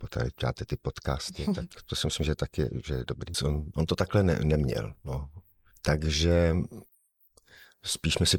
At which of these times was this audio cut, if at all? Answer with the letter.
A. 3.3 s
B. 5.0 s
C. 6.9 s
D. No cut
A